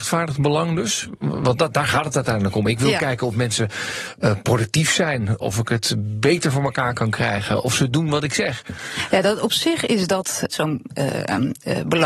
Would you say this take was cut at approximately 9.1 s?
no; 2 cuts; at 5.4 s, 10.5 s

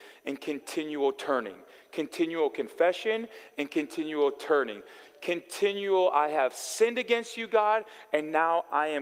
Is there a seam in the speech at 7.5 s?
no; 0 cuts

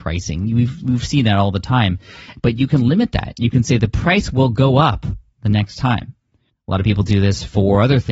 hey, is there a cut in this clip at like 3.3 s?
no; 1 cut; at 6.5 s

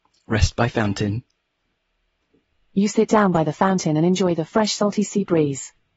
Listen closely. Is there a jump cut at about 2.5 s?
no; 0 cuts

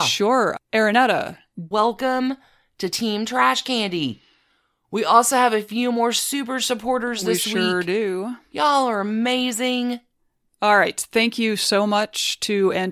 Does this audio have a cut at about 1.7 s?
yes; 1 cut; at 1.7 s

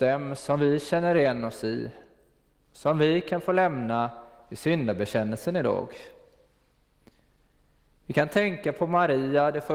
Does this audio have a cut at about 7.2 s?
no; 0 cuts

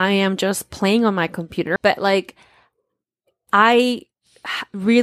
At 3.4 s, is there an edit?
no; 1 cut; at 1.8 s

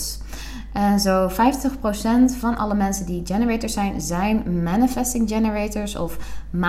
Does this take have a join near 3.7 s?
no; 0 cuts

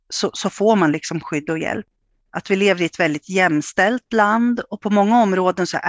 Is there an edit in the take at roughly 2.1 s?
no; 0 cuts

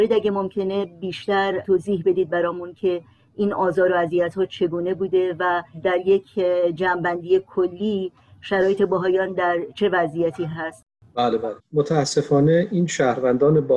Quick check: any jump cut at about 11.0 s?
no; 0 cuts

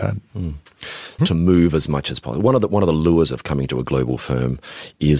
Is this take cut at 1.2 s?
yes; 1 cut; at 1.2 s

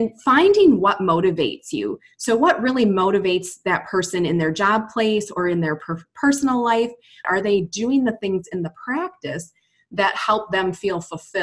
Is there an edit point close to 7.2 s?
yes; 1 cut; at 7.2 s

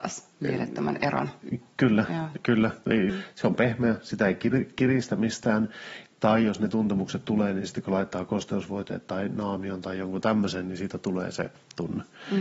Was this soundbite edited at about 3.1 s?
yes; 1 cut; at 3.1 s

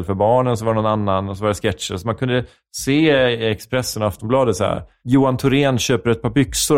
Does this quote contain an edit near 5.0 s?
yes; 1 cut; at 5.0 s

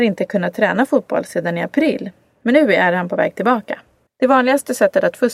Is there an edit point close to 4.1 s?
yes; 1 cut; at 4.1 s

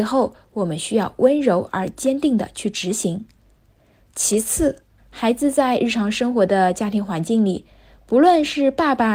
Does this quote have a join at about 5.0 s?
yes; 1 cut; at 5.0 s

